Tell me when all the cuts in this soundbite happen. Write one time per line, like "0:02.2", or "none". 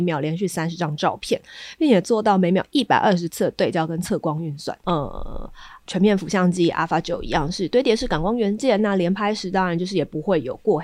0:04.8